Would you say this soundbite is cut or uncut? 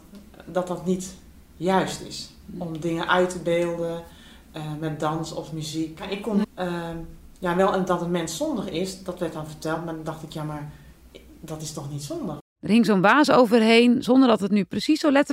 cut